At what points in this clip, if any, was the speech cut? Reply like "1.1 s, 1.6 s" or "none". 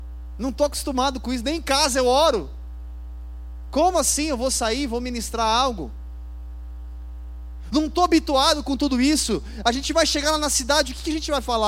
none